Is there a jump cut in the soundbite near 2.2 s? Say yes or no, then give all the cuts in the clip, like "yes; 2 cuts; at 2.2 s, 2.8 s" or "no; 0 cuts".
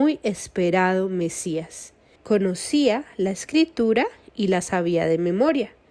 yes; 1 cut; at 2.2 s